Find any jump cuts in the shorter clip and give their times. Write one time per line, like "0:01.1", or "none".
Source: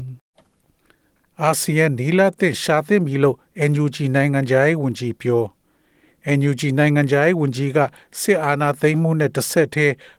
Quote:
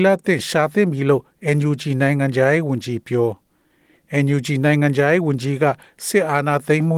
none